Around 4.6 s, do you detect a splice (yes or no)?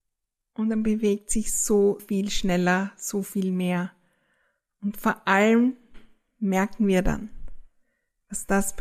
no